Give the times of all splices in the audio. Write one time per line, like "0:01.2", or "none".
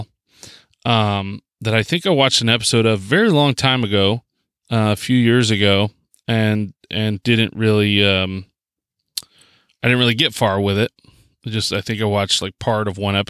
none